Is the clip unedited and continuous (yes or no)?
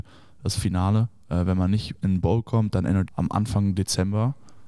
no